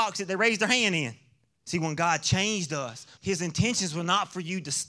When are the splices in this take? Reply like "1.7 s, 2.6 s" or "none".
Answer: 1.6 s, 3.2 s